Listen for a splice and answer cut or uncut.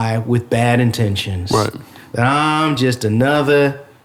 uncut